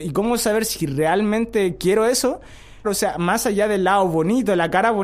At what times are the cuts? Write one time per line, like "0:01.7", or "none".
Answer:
0:02.8